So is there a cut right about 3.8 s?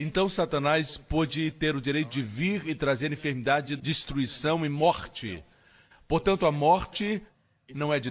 yes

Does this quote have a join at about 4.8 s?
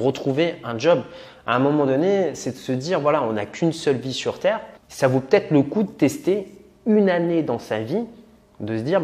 yes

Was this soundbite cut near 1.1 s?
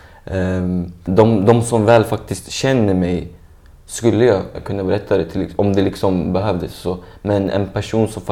yes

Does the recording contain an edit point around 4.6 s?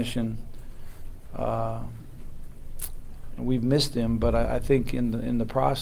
no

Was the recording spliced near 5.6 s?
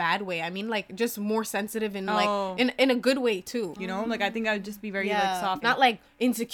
yes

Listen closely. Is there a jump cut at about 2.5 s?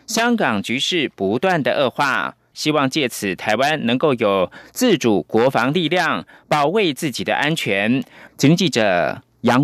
yes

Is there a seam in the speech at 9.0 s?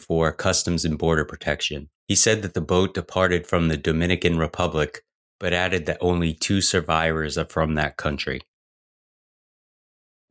no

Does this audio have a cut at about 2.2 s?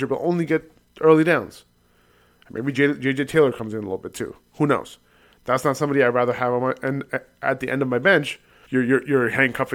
no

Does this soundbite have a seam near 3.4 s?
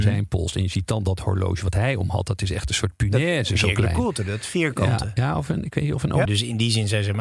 no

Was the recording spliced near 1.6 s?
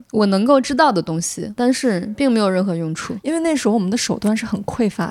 yes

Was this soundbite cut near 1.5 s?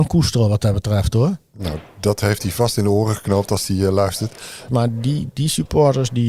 no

